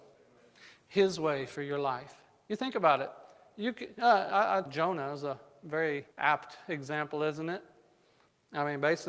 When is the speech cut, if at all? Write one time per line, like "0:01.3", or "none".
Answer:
0:04.7
0:06.1